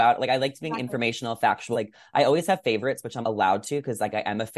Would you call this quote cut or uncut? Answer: cut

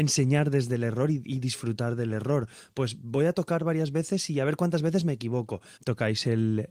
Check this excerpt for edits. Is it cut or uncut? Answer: cut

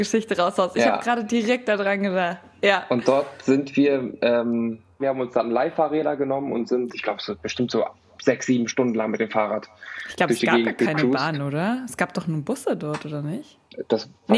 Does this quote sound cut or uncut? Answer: cut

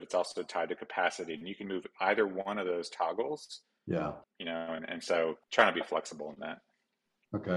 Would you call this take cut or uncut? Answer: cut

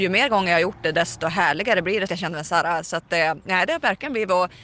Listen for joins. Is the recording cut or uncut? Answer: cut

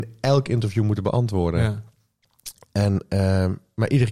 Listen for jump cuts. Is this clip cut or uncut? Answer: uncut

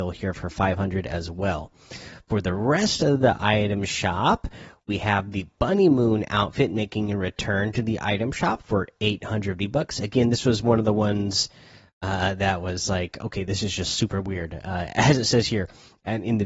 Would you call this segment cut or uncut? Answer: uncut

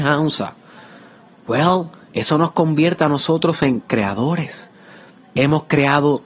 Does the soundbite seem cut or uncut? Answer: uncut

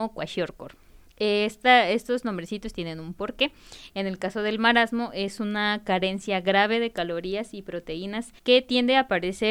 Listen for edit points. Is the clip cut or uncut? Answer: cut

